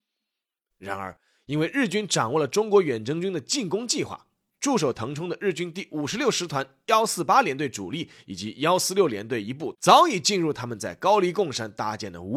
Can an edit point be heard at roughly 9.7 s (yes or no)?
yes